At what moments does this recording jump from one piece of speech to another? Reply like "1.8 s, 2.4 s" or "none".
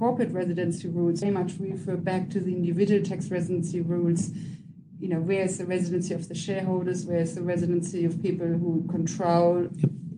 1.2 s